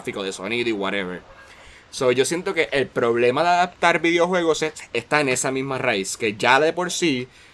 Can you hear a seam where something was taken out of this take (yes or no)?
no